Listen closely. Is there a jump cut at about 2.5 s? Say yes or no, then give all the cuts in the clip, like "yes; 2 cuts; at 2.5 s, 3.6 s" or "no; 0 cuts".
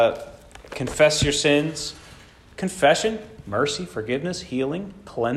yes; 1 cut; at 2.5 s